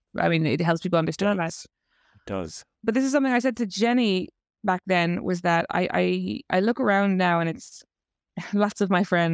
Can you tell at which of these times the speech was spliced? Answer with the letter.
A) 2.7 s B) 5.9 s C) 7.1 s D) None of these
D